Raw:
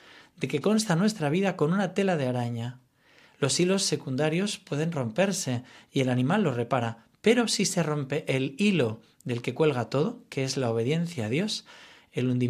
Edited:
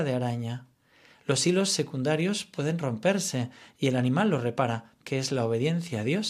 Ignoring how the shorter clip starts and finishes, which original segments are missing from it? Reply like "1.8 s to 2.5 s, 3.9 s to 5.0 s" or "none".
7.2 s to 10.3 s